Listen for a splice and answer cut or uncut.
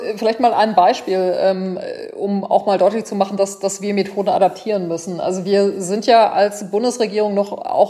uncut